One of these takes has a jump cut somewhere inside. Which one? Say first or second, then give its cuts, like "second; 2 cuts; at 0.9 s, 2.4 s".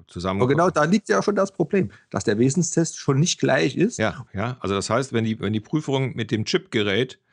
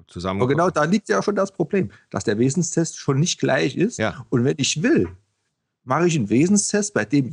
first; 1 cut; at 4.3 s